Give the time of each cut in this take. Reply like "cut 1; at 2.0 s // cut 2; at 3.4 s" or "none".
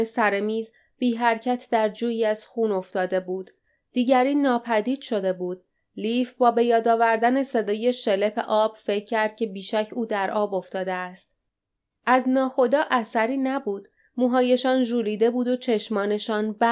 cut 1; at 14.0 s